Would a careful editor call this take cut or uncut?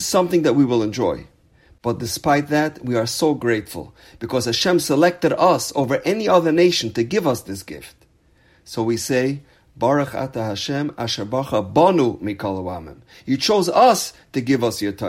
uncut